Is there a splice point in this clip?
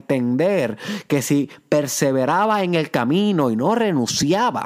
no; 0 cuts

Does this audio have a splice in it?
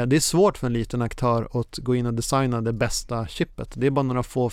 no; 0 cuts

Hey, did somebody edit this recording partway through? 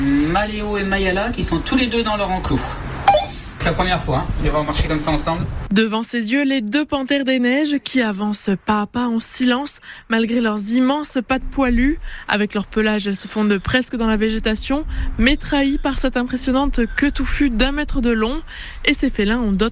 no; 0 cuts

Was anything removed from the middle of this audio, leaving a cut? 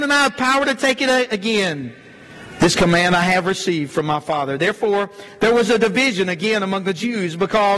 no; 0 cuts

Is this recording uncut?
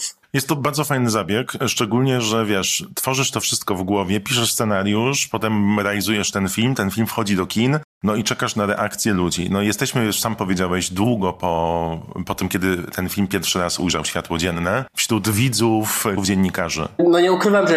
no; 2 cuts; at 14.9 s, 16.2 s

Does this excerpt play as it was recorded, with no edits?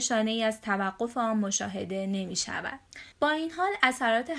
no; 1 cut; at 3.1 s

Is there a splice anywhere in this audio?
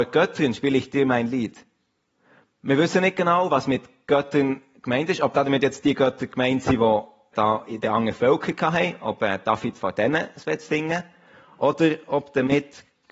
yes; 1 cut; at 7.3 s

